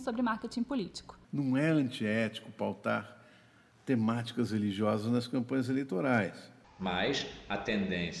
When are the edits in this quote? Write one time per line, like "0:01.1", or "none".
0:01.2
0:06.6